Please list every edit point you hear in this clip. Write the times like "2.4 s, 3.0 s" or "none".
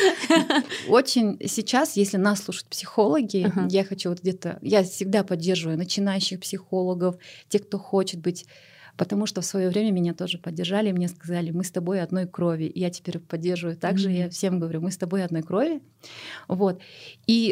none